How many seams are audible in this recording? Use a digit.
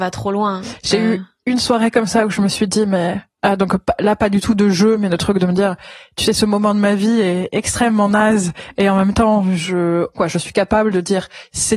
1